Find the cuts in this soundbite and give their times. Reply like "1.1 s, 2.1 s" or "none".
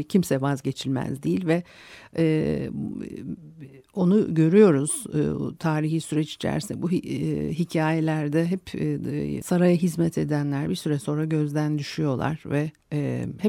9.4 s